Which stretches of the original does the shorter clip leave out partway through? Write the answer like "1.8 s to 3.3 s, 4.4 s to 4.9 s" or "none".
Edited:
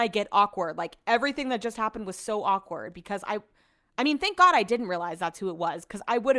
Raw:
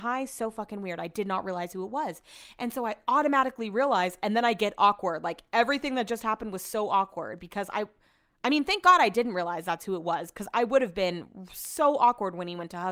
none